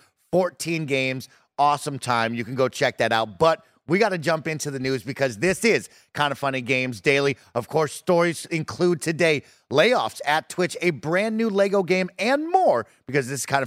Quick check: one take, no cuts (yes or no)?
yes